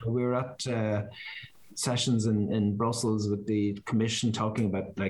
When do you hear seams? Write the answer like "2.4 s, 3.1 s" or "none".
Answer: none